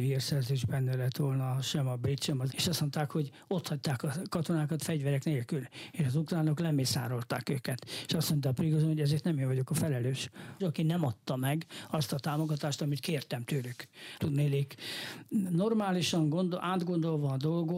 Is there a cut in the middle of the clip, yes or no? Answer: yes